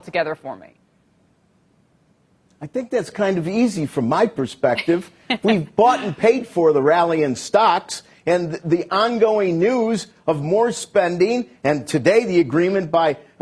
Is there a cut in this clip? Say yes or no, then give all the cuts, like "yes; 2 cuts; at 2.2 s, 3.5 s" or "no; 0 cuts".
no; 0 cuts